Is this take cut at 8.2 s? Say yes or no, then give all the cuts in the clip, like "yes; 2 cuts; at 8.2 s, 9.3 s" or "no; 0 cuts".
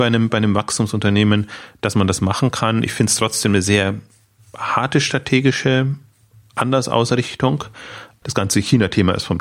yes; 1 cut; at 8.2 s